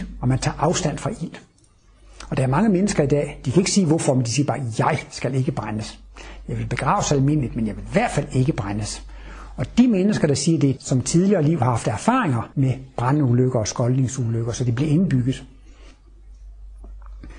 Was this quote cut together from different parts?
yes; 2 cuts; at 10.8 s, 12.5 s

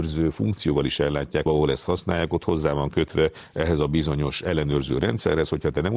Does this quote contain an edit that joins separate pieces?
yes; 1 cut; at 1.5 s

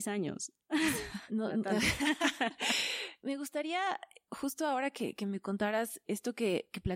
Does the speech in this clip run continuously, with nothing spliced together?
no; 1 cut; at 1.3 s

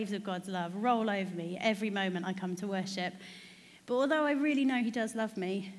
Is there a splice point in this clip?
no; 0 cuts

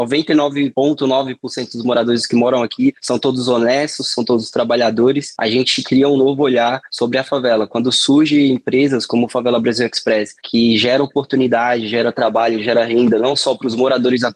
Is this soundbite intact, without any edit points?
yes; 0 cuts

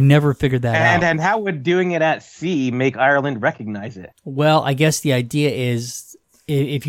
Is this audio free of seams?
yes; 0 cuts

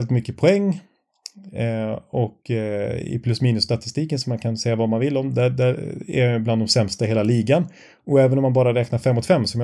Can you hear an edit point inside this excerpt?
no; 0 cuts

